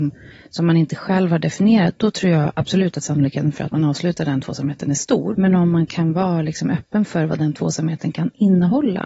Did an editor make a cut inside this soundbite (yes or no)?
yes